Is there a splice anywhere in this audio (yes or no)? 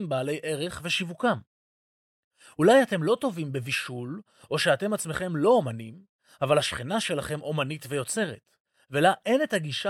no